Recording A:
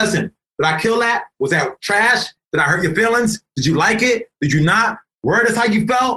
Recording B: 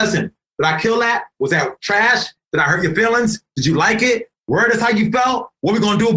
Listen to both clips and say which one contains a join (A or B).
B